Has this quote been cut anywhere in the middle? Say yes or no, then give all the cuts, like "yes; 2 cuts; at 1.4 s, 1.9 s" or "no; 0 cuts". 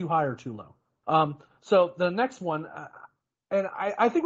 yes; 1 cut; at 1.0 s